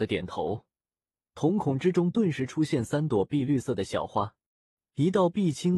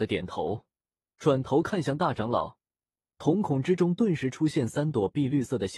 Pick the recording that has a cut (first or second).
first